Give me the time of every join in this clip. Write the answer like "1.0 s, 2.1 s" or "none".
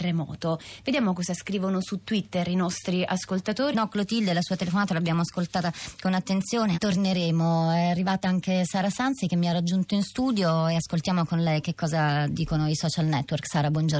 3.7 s, 6.7 s